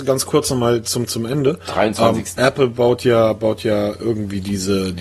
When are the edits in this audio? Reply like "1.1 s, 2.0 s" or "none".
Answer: 2.4 s